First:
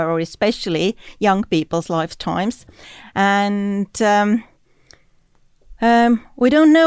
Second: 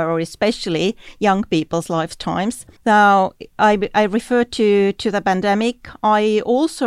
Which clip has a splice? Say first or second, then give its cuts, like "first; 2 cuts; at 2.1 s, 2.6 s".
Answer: second; 1 cut; at 2.8 s